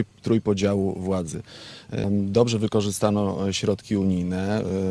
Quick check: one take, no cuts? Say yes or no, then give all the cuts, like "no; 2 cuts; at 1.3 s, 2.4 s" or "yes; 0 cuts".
no; 1 cut; at 2.0 s